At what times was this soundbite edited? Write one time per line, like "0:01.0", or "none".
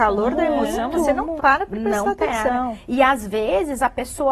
0:01.4